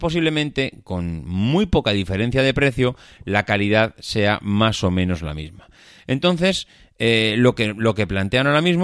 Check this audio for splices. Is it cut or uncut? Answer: uncut